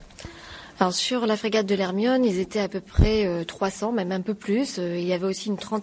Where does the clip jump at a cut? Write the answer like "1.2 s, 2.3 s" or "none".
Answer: none